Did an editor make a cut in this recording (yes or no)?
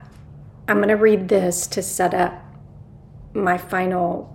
no